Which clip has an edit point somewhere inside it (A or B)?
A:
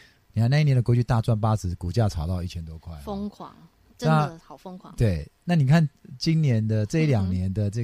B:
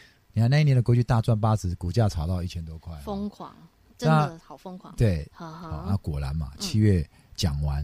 B